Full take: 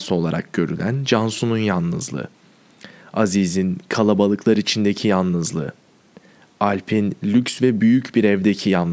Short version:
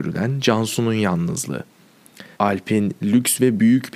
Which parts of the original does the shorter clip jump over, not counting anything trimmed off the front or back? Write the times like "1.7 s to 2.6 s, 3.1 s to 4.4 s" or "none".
3.0 s to 6.5 s